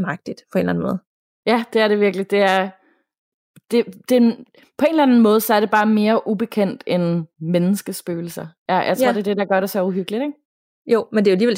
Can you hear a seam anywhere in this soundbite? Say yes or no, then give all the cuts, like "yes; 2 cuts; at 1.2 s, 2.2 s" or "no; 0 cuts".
yes; 1 cut; at 7.3 s